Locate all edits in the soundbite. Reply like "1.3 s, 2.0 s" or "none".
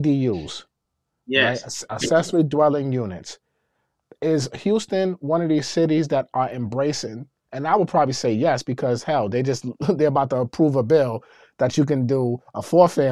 none